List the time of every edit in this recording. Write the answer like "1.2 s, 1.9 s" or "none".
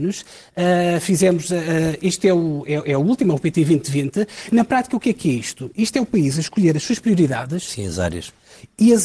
none